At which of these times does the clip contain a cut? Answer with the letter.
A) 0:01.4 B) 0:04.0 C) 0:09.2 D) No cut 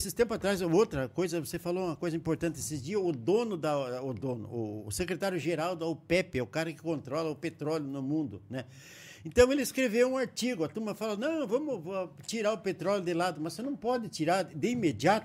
D